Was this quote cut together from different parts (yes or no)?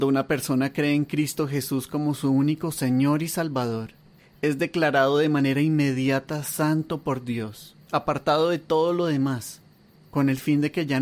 yes